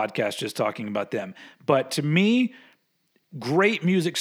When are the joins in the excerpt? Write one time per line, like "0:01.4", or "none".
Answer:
none